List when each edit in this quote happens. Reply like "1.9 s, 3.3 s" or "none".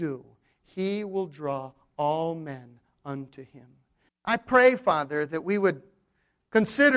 4.1 s